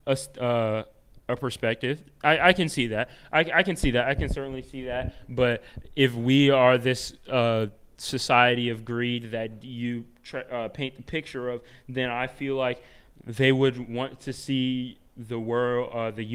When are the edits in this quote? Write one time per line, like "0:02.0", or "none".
none

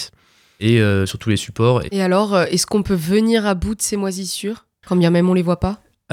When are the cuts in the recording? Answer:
0:01.9

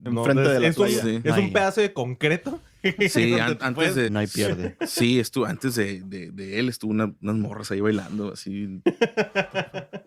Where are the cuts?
0:04.1

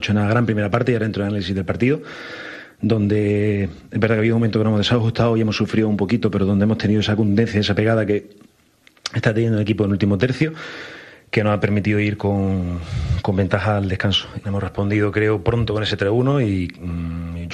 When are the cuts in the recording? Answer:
0:14.4

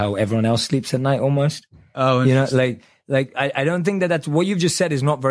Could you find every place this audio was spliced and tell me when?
none

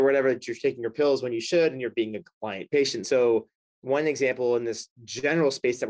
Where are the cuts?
0:03.0

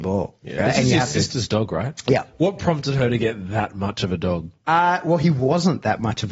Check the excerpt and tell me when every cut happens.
none

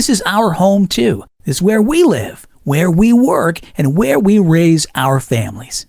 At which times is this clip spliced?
none

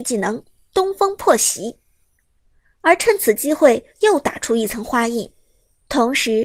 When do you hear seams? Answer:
0:02.7
0:03.9

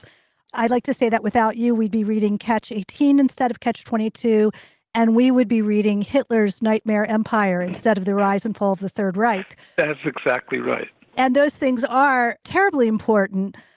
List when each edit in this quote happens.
none

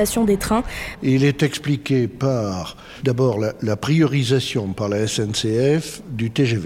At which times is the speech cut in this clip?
0:00.9

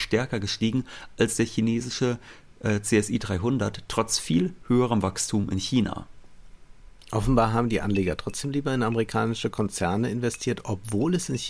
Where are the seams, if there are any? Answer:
none

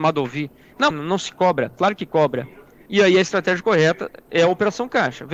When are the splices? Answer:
0:00.9
0:02.9

